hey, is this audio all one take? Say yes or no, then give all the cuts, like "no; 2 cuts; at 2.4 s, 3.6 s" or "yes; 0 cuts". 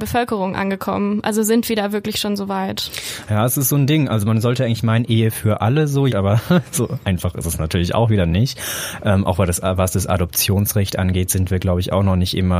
no; 1 cut; at 6.1 s